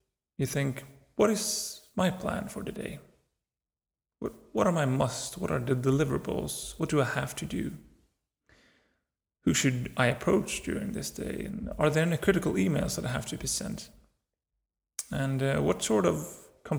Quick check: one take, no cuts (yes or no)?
yes